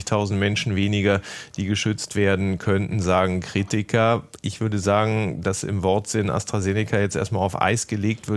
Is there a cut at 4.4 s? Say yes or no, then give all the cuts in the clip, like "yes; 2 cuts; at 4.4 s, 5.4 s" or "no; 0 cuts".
no; 0 cuts